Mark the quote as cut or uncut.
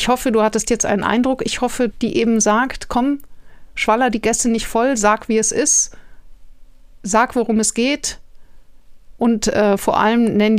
cut